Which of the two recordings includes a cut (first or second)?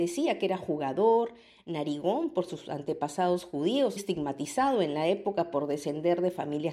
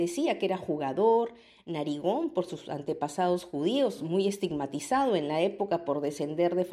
first